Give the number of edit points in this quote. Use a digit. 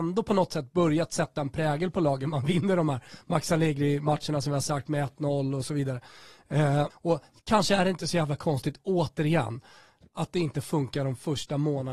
1